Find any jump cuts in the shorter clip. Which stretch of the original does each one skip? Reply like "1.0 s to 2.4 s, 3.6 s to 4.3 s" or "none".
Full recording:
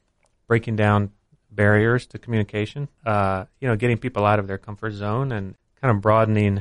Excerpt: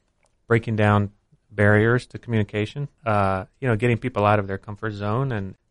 none